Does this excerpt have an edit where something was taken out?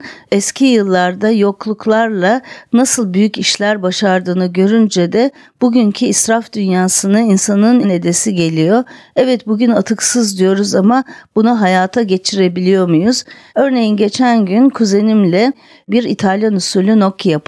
yes; 2 cuts; at 7.8 s, 13.5 s

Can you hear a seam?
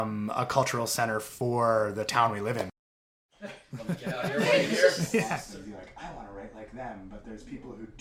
no; 0 cuts

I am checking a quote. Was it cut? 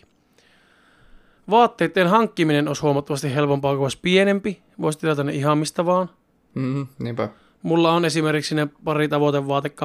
no; 0 cuts

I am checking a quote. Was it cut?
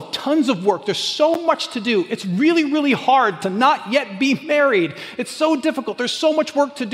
no; 0 cuts

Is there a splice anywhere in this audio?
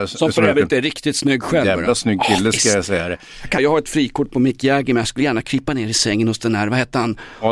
yes; 1 cut; at 3.6 s

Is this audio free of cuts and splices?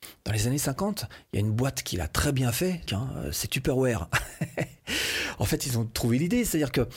no; 1 cut; at 2.9 s

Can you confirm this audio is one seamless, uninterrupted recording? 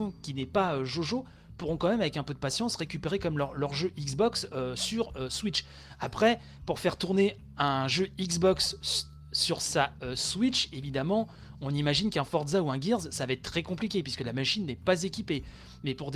yes; 0 cuts

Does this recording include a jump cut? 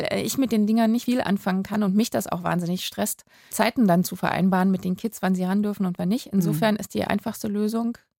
yes; 2 cuts; at 1.1 s, 3.5 s

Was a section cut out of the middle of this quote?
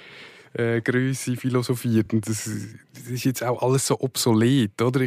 no; 0 cuts

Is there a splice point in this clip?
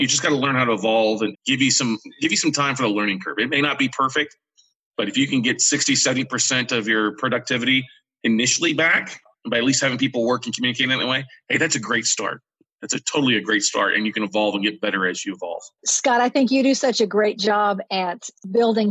yes; 2 cuts; at 1.3 s, 15.8 s

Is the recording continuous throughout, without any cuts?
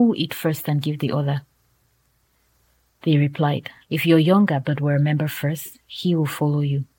no; 1 cut; at 3.8 s

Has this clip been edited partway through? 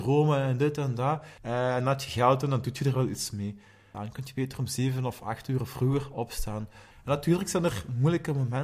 yes; 3 cuts; at 1.4 s, 3.9 s, 6.9 s

